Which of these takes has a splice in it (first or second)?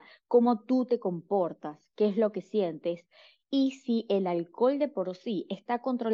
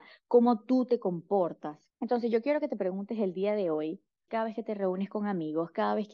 second